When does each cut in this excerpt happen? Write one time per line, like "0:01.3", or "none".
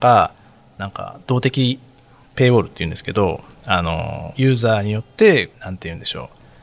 0:04.3
0:05.5